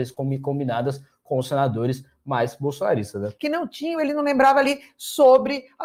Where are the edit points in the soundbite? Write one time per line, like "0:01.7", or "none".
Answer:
0:03.4